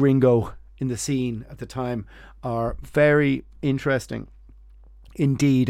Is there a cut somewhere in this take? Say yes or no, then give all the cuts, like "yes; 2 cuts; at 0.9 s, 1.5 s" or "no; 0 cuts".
no; 0 cuts